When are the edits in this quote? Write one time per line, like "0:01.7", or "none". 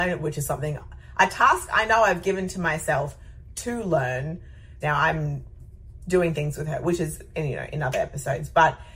0:04.8